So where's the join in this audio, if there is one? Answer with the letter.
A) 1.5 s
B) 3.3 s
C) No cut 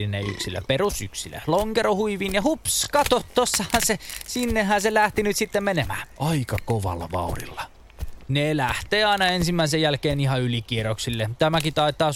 C